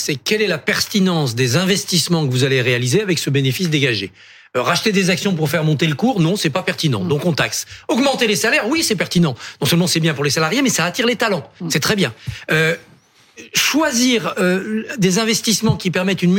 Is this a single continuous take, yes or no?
yes